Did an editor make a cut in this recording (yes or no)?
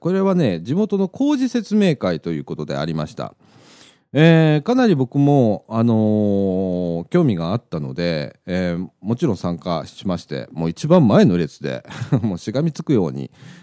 no